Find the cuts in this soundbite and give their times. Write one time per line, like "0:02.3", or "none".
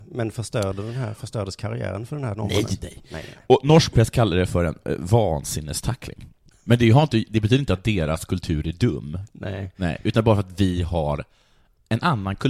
0:06.5